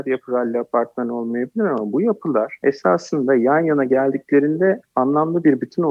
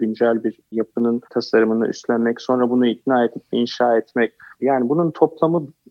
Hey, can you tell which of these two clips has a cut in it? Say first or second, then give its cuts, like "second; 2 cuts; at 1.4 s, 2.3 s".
second; 2 cuts; at 1.2 s, 4.6 s